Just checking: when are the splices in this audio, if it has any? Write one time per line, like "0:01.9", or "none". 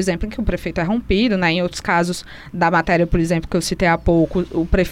none